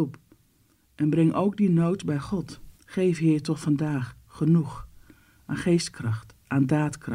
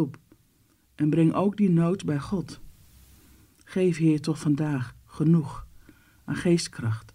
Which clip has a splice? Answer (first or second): first